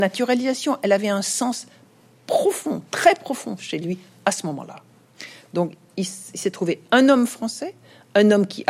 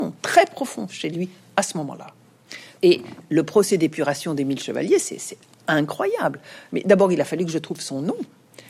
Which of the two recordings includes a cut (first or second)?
second